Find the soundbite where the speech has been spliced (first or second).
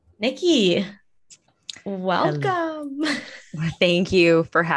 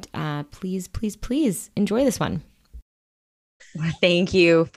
second